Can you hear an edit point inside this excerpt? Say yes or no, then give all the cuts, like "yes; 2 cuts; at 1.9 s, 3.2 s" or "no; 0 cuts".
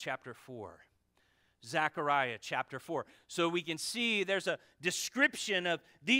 no; 0 cuts